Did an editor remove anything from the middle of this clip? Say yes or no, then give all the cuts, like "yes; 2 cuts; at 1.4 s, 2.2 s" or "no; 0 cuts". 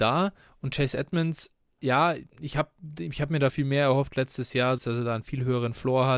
yes; 3 cuts; at 1.8 s, 3.5 s, 4.8 s